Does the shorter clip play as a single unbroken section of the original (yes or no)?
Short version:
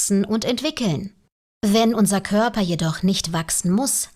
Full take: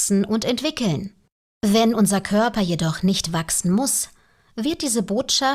yes